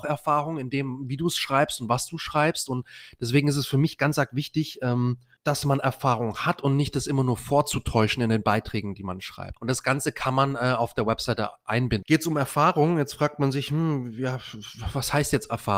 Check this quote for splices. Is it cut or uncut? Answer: cut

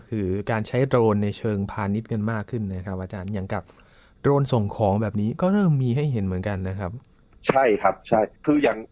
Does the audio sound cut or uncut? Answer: uncut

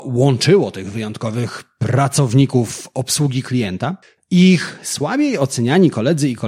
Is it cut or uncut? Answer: cut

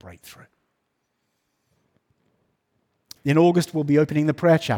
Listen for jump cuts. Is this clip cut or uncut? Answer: cut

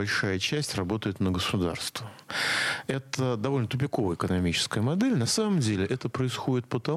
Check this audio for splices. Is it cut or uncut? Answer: uncut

